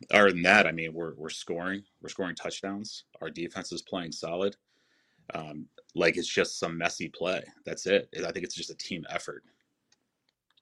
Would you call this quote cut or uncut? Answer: uncut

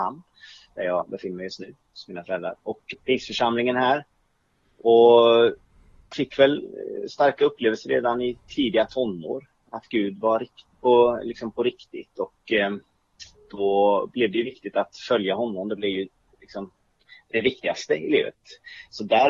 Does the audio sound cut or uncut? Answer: cut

